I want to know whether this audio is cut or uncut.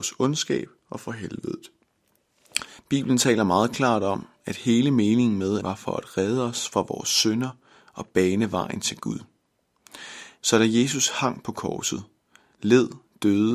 cut